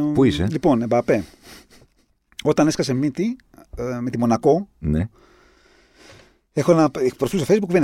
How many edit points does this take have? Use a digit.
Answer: 0